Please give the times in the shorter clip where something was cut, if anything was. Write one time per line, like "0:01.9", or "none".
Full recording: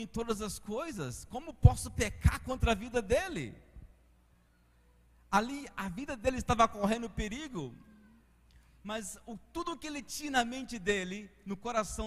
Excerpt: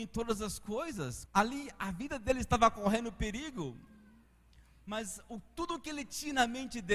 0:01.3